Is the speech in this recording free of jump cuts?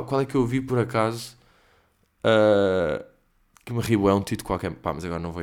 yes; 0 cuts

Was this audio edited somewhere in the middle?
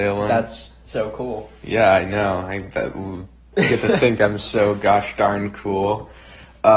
no; 0 cuts

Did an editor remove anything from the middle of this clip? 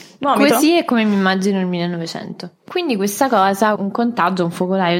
yes; 2 cuts; at 2.6 s, 3.8 s

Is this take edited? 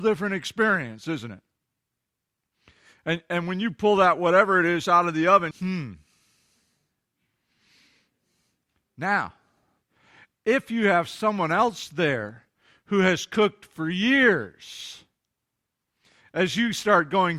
yes; 1 cut; at 5.5 s

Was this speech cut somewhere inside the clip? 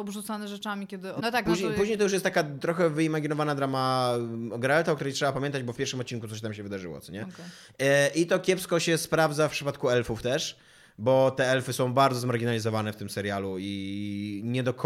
yes; 1 cut; at 1.2 s

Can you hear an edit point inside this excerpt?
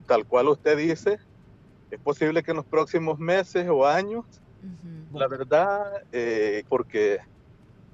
yes; 2 cuts; at 5.1 s, 6.7 s

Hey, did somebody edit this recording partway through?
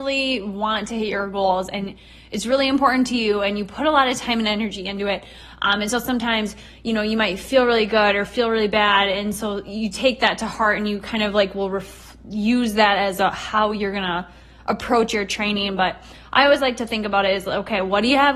no; 0 cuts

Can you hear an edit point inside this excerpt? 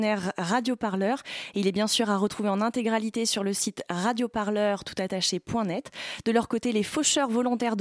no; 0 cuts

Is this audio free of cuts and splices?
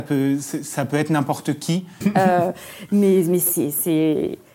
no; 1 cut; at 2.0 s

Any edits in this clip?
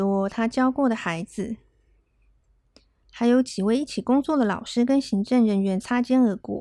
no; 0 cuts

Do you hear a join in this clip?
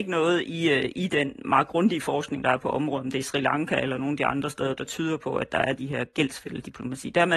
no; 0 cuts

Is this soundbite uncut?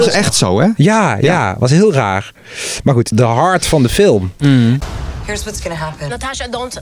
no; 1 cut; at 3.1 s

